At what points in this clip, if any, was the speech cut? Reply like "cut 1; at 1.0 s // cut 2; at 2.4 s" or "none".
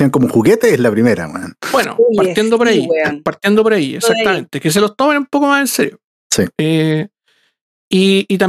none